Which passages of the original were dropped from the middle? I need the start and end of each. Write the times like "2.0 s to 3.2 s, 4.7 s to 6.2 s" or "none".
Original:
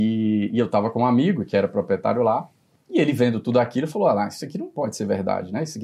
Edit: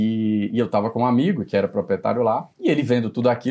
2.5 s to 2.8 s